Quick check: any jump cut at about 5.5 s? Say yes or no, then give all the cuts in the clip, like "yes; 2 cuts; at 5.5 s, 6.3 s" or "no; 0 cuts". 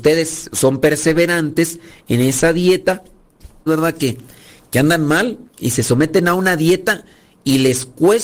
yes; 2 cuts; at 3.7 s, 5.5 s